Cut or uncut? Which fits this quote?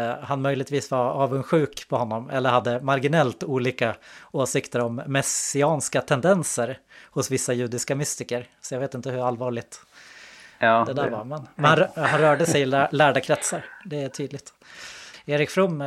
uncut